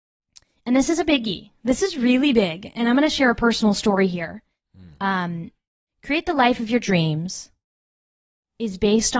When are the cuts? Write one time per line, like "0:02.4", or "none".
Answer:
none